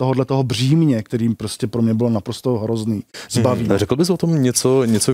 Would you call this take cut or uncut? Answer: cut